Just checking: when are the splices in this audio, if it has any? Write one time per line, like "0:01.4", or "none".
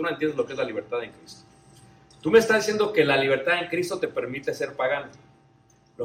none